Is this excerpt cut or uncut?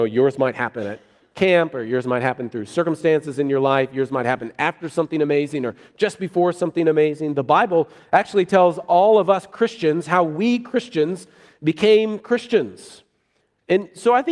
uncut